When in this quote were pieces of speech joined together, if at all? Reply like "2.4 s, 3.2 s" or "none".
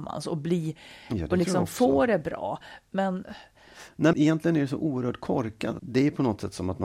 4.1 s, 5.8 s